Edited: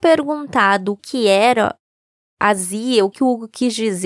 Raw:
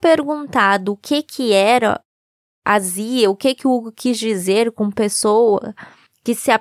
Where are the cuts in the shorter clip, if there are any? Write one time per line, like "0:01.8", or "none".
0:01.0
0:03.1